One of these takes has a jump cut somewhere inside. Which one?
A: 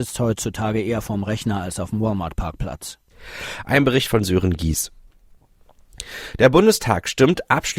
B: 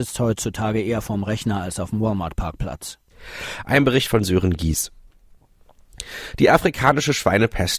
A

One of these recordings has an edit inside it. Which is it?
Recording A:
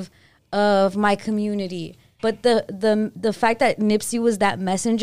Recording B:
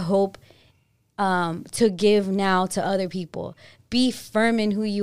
A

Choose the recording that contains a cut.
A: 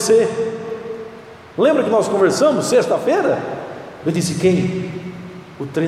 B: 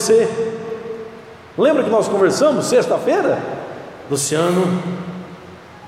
A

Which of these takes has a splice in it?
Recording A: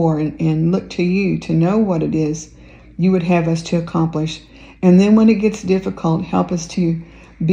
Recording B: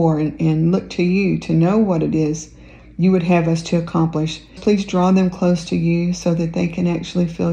B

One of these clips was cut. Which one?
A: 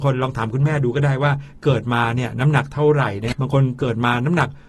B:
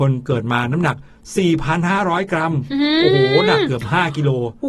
A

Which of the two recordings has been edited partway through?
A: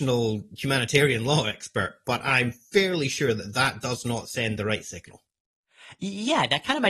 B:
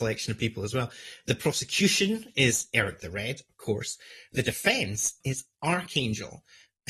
B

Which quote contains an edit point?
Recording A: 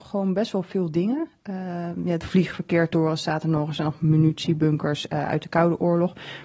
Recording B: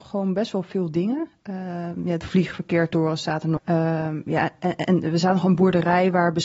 B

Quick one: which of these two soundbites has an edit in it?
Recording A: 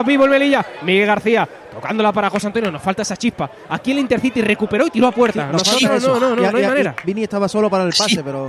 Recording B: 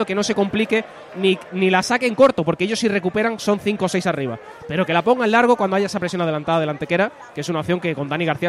A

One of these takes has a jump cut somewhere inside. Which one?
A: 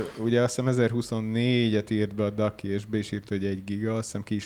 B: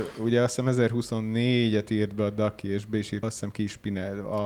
B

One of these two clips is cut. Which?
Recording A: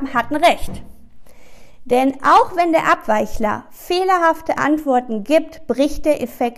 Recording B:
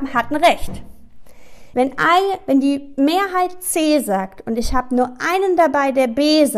B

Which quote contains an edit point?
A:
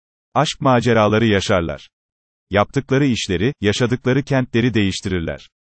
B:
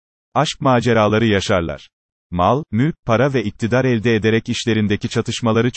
B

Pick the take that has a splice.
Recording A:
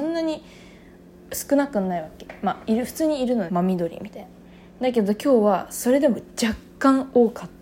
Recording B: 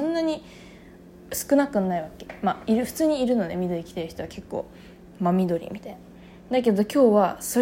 A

